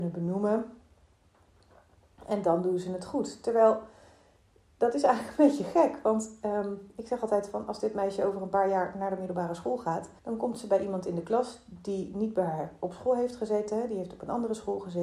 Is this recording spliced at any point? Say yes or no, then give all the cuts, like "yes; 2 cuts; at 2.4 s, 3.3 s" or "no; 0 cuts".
yes; 1 cut; at 10.2 s